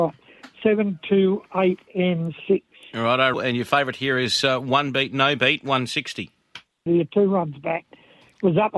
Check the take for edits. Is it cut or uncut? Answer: cut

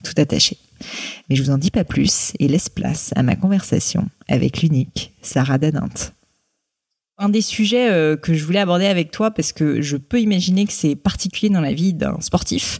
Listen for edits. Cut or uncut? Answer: uncut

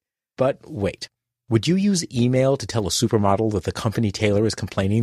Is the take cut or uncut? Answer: uncut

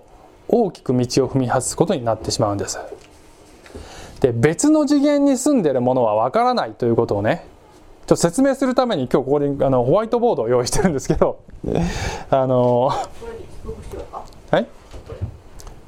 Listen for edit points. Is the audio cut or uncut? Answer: uncut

